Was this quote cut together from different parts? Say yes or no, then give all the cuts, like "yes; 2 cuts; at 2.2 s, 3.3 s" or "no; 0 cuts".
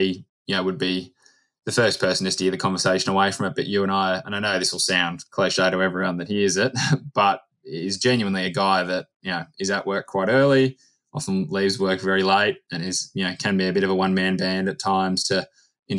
yes; 2 cuts; at 4.2 s, 12.7 s